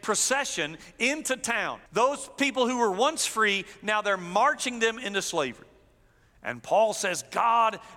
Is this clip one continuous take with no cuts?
no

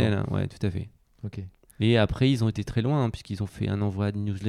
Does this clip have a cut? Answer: no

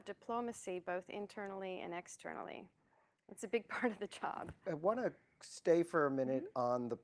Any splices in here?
no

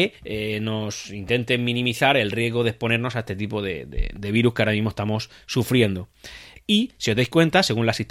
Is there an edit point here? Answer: yes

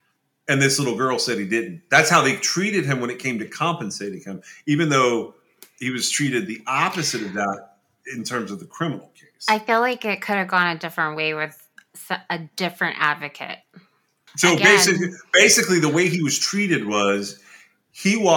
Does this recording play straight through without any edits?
no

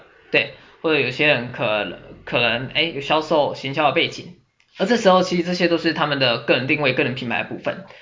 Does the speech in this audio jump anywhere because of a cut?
no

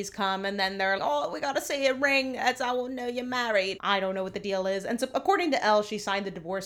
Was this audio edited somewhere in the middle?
yes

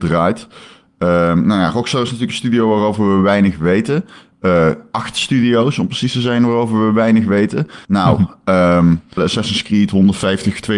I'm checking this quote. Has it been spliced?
yes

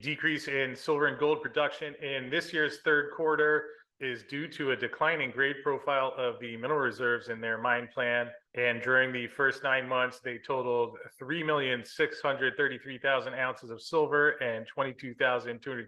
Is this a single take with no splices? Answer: no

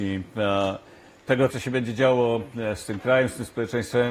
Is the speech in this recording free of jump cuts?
no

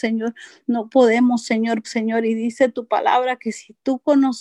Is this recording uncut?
no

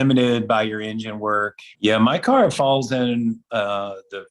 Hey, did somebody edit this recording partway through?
yes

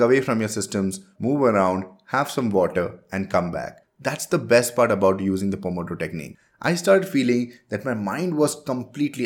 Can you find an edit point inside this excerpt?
yes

